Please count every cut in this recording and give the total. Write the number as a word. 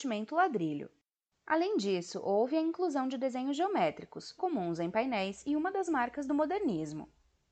one